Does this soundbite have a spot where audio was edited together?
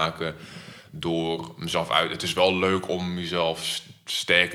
no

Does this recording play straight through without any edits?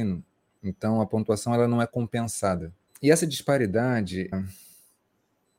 no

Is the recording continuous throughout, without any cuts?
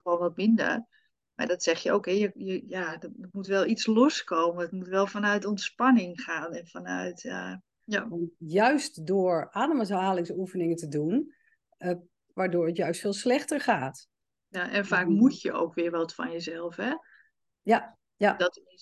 no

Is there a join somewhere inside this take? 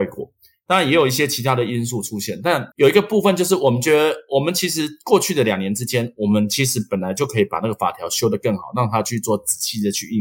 yes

